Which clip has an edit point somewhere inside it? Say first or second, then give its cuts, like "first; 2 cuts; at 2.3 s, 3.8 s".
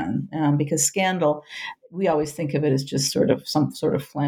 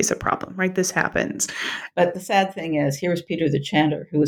second; 1 cut; at 1.9 s